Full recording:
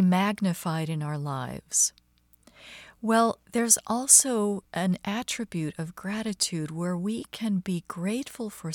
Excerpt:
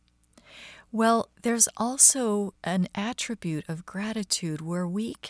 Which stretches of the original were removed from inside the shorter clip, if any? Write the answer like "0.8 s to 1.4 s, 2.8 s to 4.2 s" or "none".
none